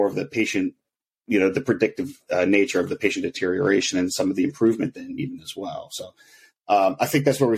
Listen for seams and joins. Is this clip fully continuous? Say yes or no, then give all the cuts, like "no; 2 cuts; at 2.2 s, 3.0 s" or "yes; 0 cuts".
yes; 0 cuts